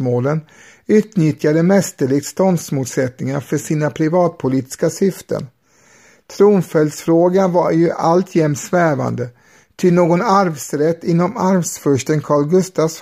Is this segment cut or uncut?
uncut